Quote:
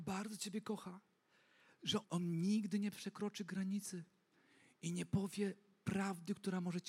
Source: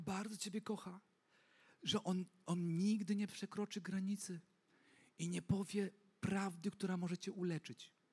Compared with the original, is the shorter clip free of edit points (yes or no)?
no